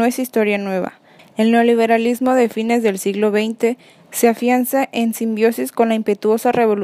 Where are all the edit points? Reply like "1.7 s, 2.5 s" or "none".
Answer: 1.2 s